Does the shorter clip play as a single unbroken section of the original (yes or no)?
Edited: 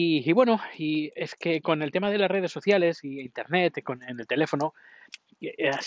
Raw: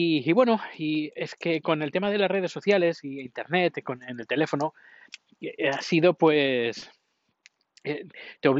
yes